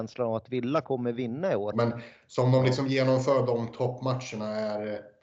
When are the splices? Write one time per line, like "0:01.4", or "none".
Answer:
0:01.7